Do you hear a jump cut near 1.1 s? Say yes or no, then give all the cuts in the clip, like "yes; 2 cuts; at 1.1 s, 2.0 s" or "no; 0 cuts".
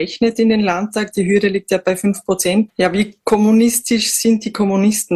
no; 1 cut; at 2.7 s